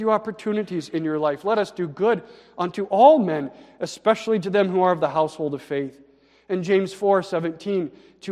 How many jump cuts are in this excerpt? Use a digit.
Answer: 0